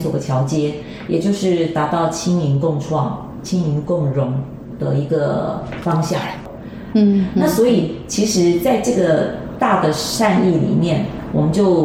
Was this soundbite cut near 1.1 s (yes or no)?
no